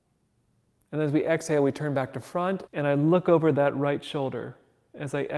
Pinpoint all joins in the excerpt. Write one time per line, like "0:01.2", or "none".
0:02.7